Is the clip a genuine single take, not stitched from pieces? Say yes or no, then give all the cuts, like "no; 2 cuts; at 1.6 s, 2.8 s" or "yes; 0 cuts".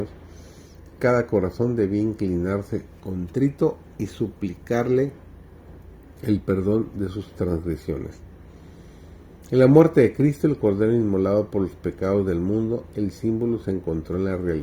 yes; 0 cuts